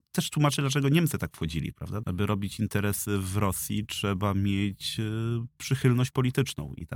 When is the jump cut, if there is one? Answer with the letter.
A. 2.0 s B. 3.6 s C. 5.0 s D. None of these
A